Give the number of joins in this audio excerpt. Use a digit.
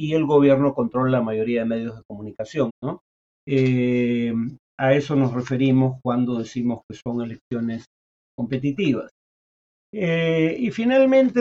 1